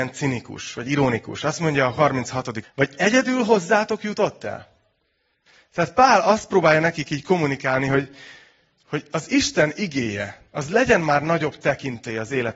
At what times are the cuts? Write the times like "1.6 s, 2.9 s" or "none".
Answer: 2.6 s